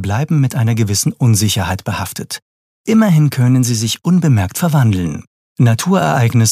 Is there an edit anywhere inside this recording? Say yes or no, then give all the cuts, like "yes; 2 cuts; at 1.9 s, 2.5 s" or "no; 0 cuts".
no; 0 cuts